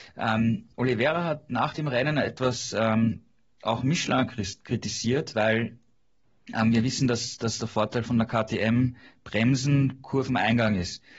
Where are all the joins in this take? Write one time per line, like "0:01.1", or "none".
0:08.0